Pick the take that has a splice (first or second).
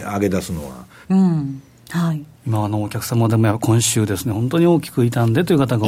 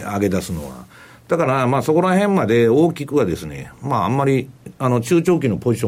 first